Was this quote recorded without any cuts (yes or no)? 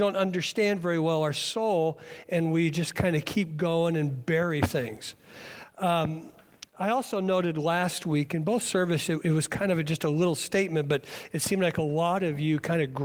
yes